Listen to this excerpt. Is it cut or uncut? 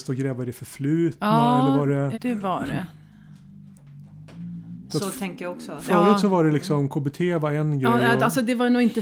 cut